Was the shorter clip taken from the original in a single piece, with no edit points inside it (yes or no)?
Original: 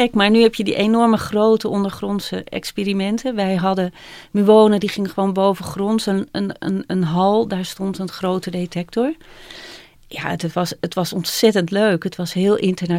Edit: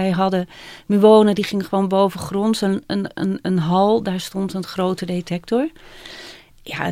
yes